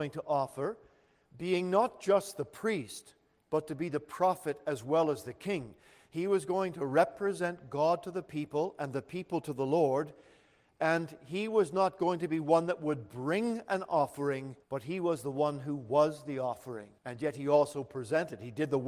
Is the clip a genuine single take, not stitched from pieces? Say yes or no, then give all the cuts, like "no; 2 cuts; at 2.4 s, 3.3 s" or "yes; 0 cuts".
no; 2 cuts; at 14.6 s, 17.0 s